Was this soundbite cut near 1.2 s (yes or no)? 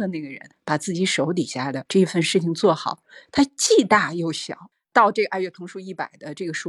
no